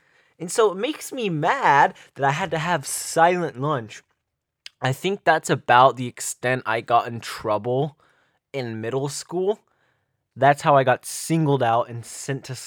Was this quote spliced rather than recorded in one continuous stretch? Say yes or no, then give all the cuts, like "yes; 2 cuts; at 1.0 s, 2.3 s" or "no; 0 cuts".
yes; 1 cut; at 10.3 s